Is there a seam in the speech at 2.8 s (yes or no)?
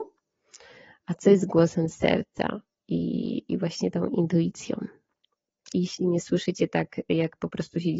no